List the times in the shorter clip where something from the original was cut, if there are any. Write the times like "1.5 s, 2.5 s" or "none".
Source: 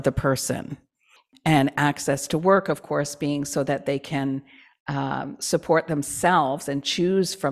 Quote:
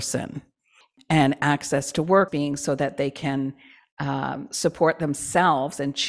2.3 s